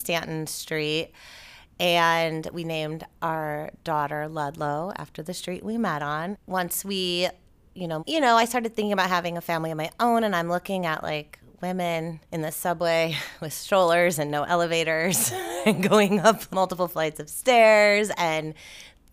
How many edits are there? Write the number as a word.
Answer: three